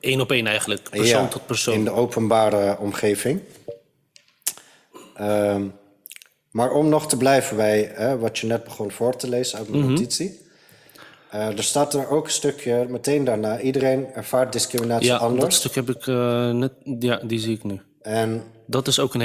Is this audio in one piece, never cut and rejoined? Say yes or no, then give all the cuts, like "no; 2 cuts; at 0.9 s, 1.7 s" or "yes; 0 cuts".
yes; 0 cuts